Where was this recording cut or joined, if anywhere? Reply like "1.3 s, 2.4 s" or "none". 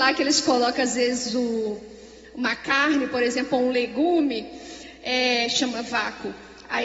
none